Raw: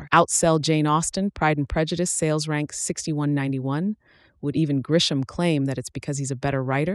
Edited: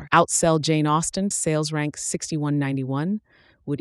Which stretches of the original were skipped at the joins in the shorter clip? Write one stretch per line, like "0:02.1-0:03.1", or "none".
0:01.3-0:02.1